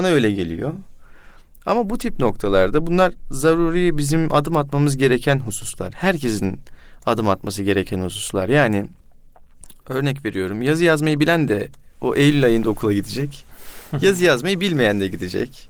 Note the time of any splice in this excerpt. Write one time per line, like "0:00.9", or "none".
none